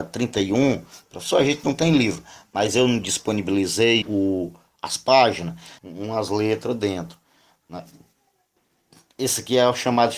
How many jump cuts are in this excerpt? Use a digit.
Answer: 2